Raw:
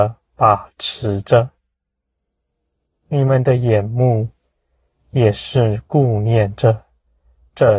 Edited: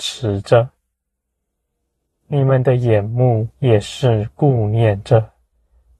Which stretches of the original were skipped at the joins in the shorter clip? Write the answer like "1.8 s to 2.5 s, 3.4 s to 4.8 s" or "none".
4.3 s to 5.0 s